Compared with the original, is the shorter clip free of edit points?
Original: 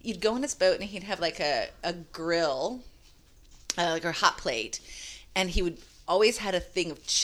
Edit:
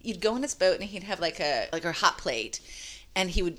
no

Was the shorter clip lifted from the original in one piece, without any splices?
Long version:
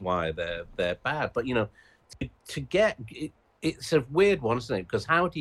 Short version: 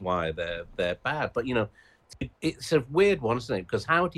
no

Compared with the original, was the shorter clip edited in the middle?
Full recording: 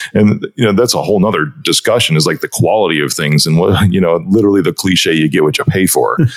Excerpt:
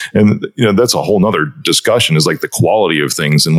no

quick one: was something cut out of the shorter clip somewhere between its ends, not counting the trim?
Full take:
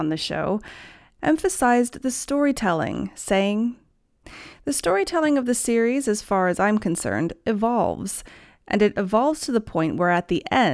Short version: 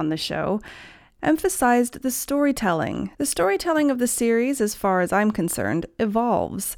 yes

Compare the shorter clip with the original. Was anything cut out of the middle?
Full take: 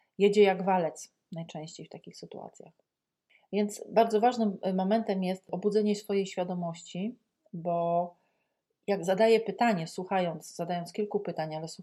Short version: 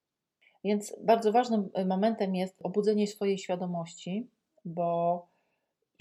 no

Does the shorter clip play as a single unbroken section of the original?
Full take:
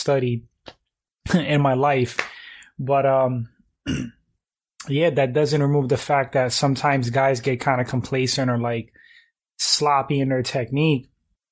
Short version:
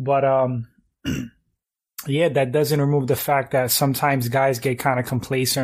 yes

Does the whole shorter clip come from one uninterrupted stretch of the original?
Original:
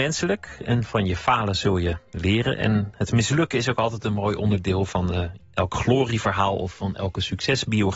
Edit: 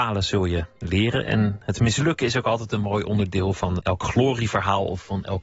no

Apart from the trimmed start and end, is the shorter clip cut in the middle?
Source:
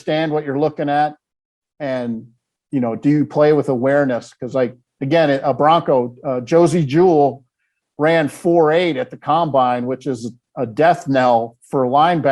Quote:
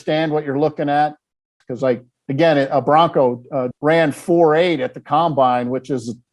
yes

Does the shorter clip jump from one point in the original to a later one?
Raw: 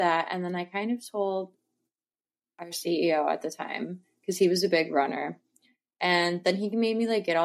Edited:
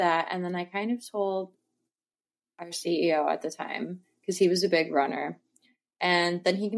no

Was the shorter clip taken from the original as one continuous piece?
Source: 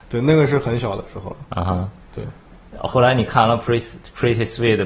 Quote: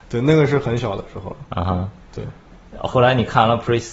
yes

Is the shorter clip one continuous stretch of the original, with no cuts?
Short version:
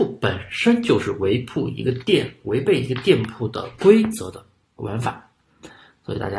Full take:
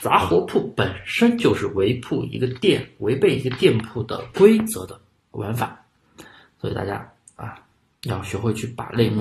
yes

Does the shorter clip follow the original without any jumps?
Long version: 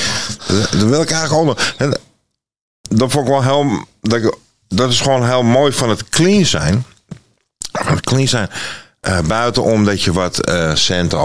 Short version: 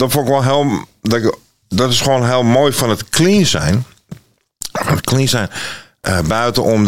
yes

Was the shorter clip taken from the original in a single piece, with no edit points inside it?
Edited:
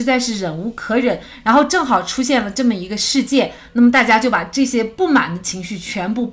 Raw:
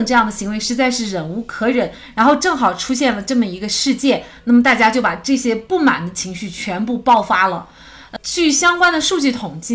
yes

